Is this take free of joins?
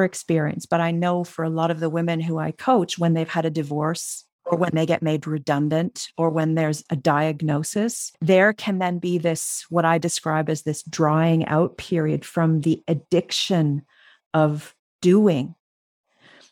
yes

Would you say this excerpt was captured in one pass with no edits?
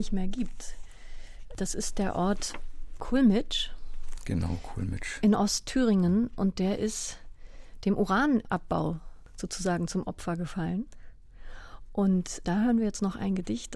no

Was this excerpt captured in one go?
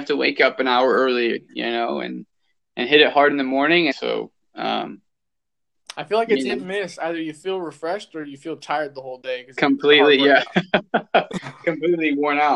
no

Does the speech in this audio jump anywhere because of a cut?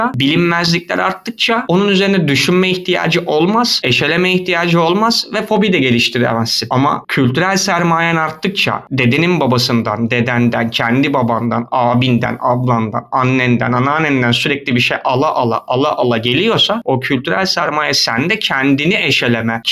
no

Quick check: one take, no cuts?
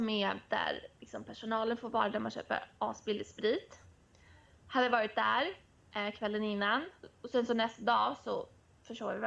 yes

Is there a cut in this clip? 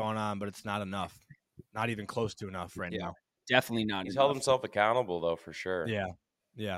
no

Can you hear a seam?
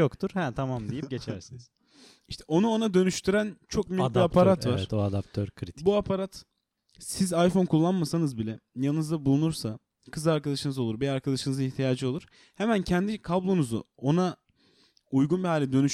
no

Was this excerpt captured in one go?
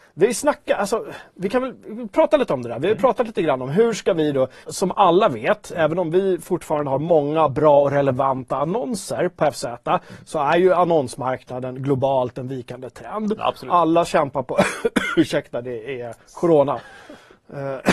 no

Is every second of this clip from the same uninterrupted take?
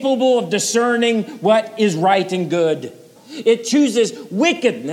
no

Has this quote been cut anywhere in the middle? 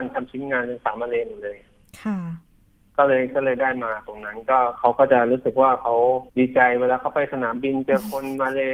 yes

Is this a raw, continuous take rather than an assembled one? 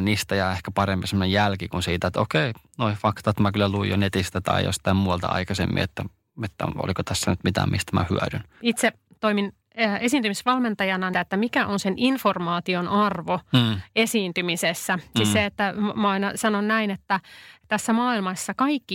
no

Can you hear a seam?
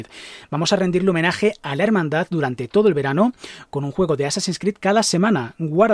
no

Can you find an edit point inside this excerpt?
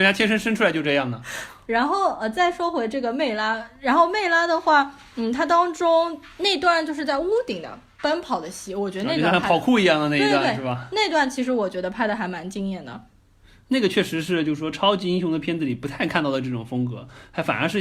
yes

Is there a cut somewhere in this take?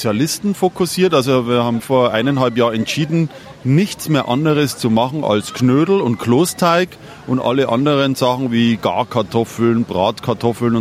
yes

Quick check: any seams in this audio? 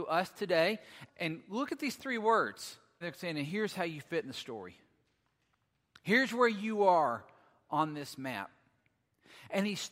yes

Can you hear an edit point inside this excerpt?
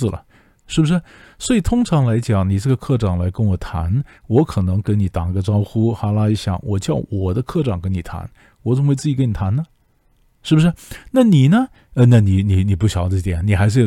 no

